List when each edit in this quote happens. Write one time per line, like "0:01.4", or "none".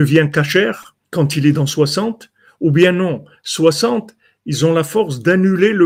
0:01.0